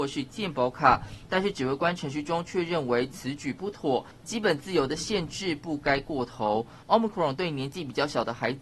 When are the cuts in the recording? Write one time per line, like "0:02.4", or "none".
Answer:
0:06.8